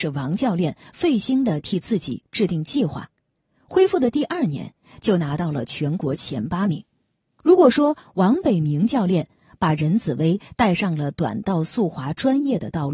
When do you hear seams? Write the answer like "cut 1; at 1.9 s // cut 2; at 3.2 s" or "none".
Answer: cut 1; at 7.3 s